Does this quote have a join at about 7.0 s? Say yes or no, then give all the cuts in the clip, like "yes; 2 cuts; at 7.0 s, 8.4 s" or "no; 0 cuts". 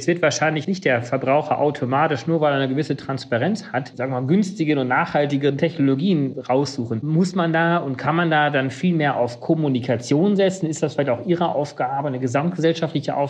no; 1 cut; at 3.9 s